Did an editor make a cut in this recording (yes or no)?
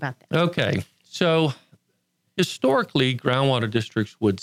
no